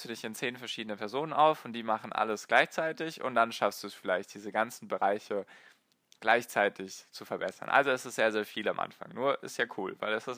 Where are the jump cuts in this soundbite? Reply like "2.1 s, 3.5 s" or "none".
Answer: none